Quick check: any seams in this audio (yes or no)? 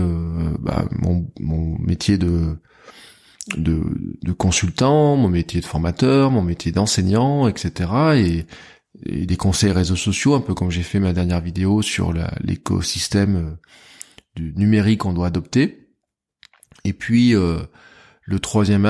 no